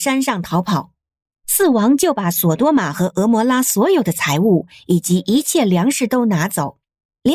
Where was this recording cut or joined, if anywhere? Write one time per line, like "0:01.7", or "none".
none